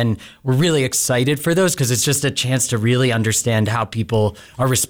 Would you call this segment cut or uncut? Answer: uncut